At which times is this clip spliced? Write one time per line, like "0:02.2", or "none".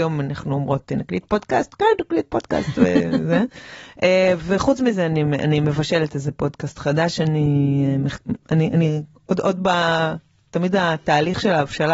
none